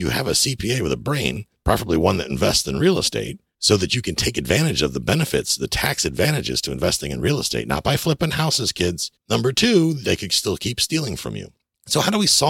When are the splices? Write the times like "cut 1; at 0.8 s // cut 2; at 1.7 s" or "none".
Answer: cut 1; at 9.2 s